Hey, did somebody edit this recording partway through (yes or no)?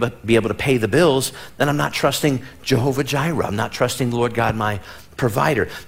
no